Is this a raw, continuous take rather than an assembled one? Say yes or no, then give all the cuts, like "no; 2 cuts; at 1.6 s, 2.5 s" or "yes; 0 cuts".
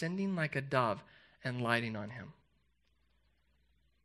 yes; 0 cuts